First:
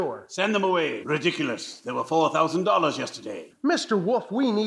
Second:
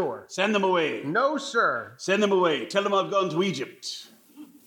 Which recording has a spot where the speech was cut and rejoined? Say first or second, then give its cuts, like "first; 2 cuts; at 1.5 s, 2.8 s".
first; 2 cuts; at 1.0 s, 3.5 s